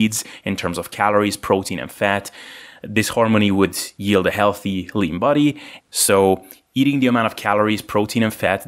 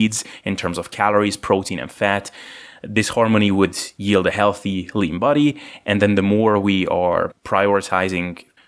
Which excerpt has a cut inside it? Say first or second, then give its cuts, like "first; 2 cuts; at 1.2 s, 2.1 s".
first; 1 cut; at 5.8 s